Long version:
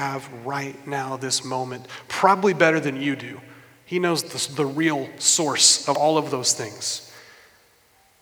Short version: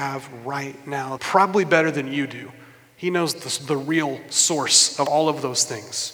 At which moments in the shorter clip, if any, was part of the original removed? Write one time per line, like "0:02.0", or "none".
0:01.2